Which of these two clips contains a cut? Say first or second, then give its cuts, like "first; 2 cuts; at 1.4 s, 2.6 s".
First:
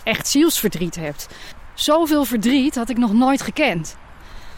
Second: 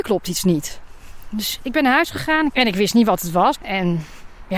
second; 2 cuts; at 2.5 s, 3.5 s